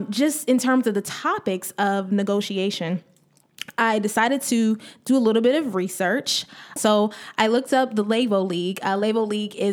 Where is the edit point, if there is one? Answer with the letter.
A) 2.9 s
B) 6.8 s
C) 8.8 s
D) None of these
B